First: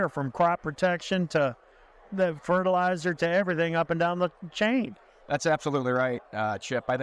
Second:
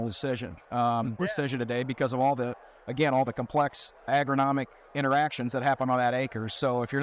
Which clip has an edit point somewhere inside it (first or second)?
second